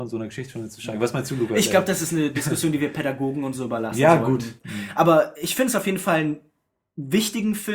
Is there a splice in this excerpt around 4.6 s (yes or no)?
yes